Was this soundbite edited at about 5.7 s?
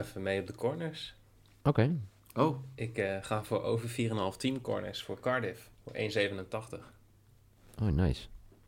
yes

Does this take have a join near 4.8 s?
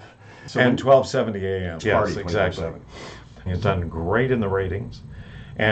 no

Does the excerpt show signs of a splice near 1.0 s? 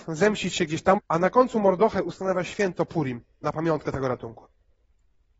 yes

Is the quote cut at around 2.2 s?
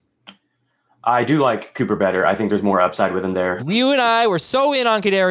no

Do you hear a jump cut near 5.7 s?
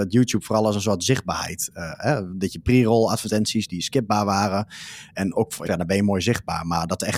yes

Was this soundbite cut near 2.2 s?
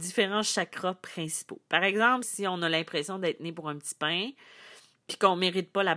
yes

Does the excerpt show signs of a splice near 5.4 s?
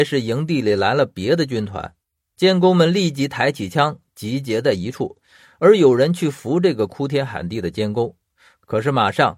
no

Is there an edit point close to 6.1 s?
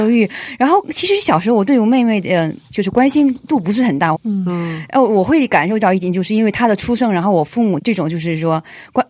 no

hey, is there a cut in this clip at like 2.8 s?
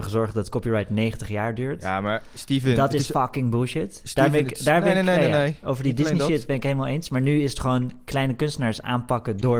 no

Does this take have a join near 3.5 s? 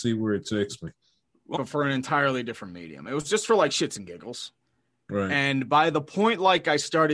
no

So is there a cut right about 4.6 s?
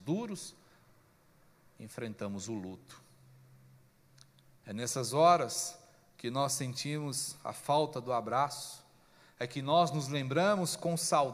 no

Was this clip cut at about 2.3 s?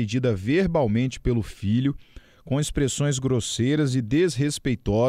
no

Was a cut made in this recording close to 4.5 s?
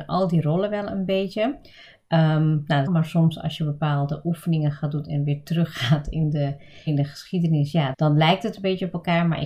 no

